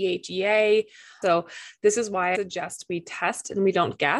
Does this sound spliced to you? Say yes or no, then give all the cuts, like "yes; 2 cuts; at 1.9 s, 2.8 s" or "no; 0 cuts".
yes; 2 cuts; at 1.2 s, 2.3 s